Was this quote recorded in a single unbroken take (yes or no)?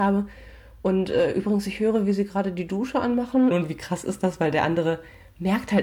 no